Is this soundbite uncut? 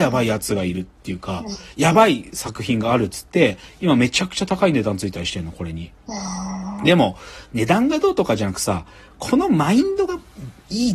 yes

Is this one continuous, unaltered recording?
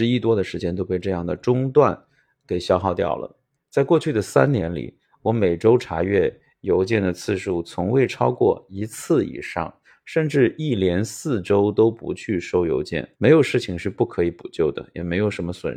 no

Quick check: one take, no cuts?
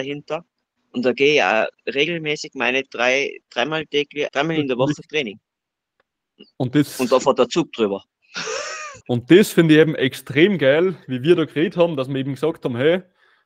no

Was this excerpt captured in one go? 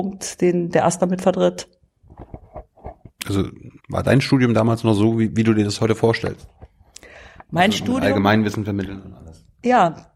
no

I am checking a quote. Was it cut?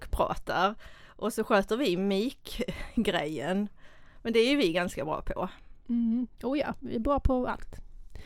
yes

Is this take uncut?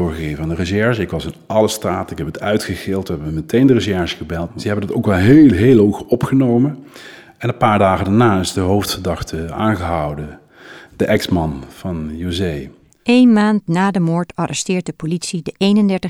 no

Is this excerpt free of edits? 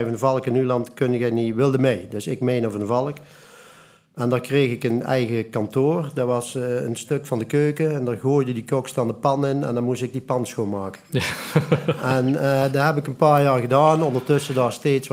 yes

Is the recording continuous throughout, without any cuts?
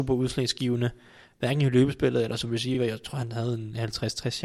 yes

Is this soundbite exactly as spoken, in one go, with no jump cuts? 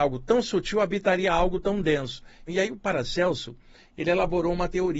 no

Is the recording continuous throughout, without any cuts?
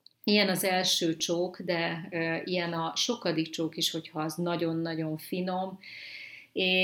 yes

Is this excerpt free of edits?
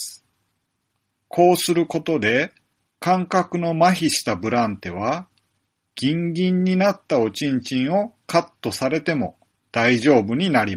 no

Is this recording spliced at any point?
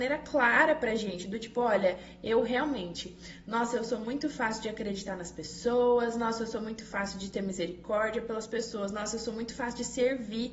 no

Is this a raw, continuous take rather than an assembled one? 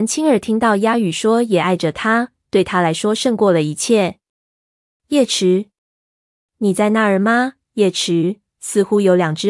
yes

